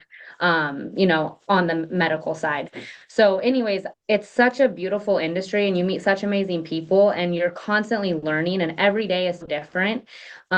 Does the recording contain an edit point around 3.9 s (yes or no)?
yes